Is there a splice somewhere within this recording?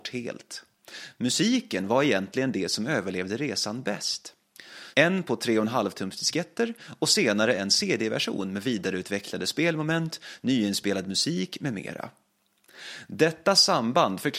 yes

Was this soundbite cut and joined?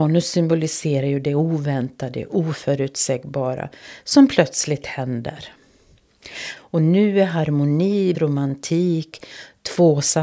yes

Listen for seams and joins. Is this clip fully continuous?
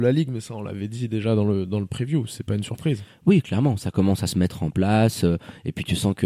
yes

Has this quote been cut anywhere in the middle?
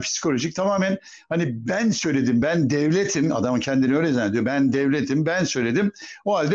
no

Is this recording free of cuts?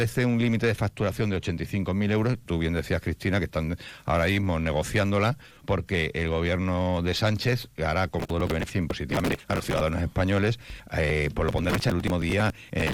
no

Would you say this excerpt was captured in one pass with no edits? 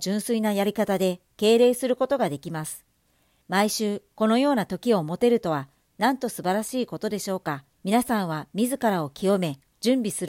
no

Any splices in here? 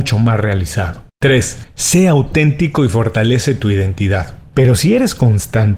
yes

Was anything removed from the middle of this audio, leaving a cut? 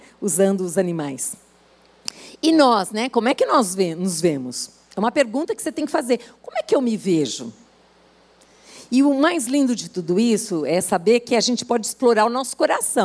no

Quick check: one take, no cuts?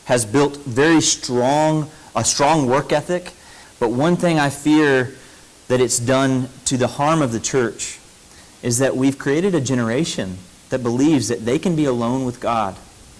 no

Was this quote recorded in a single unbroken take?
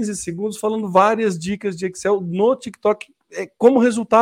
yes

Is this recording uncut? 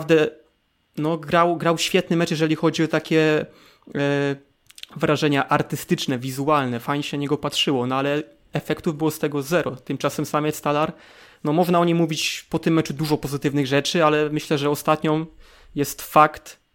yes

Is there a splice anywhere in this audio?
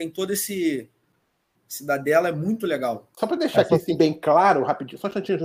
yes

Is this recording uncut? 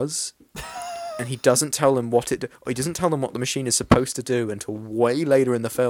yes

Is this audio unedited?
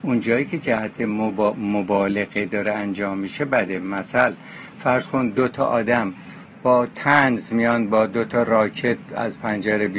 no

